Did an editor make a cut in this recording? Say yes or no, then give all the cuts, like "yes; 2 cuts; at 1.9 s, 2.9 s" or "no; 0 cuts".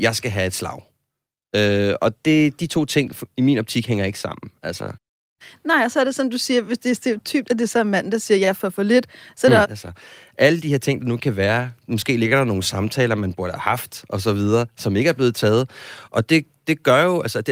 yes; 1 cut; at 9.6 s